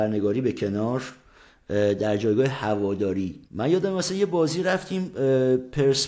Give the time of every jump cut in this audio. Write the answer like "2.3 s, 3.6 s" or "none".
3.5 s